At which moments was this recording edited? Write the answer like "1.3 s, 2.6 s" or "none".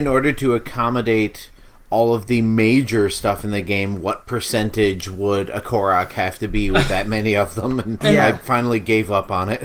8.0 s